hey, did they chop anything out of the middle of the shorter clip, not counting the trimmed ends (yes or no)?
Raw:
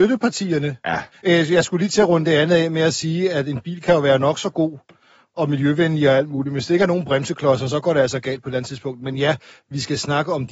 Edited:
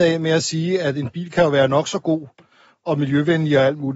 no